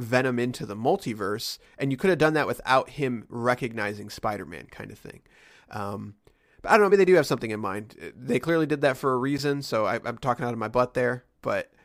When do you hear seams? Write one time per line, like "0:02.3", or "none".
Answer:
0:06.9